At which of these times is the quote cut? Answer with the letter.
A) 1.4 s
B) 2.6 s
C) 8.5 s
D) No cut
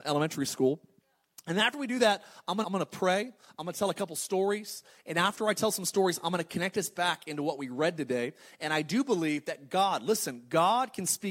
B